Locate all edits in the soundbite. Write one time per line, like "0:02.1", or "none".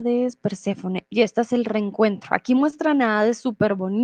0:01.1